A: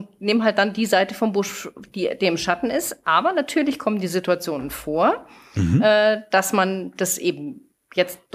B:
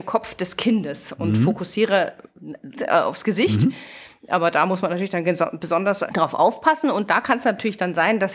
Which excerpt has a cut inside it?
B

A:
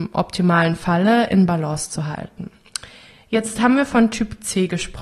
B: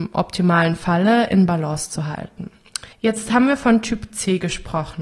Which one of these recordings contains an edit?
B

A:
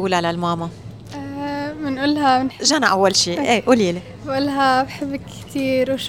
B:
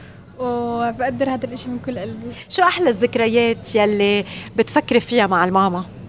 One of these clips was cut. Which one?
A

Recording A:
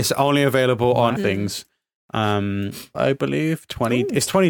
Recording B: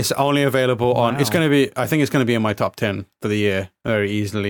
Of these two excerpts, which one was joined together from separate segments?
A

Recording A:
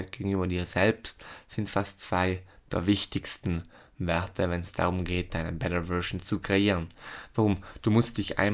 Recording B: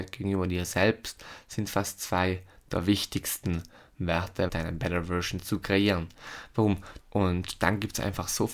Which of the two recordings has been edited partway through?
B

